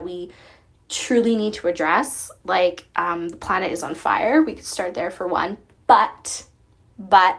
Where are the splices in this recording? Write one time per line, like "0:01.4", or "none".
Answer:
none

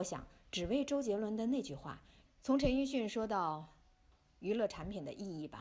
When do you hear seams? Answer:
0:02.3

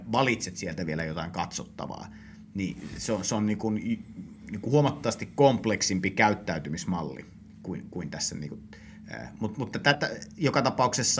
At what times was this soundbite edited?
0:09.9

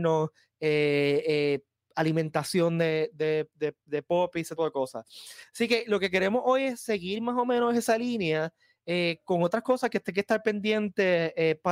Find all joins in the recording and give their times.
0:04.6

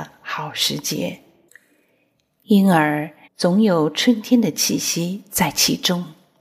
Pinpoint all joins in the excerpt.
0:03.2

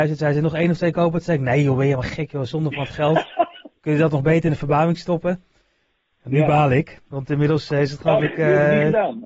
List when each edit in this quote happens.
none

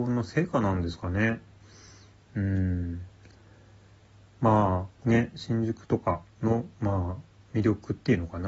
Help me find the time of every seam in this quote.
0:05.0
0:06.3

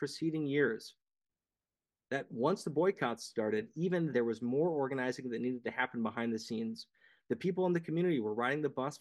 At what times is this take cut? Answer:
0:04.1

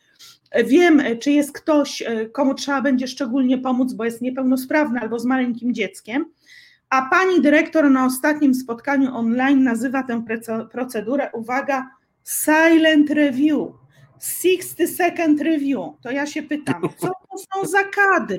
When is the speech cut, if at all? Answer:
none

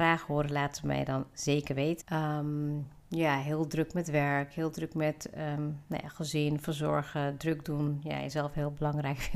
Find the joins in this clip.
0:02.0

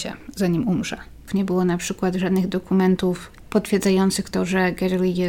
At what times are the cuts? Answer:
0:01.3

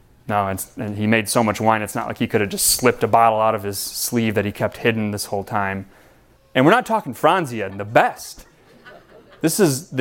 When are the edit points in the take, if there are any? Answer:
0:06.4
0:07.7

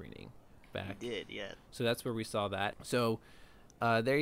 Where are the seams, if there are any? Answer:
0:01.5
0:02.7

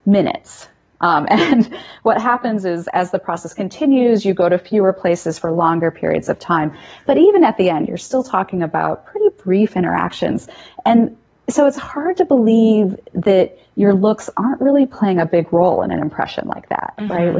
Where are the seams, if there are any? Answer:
none

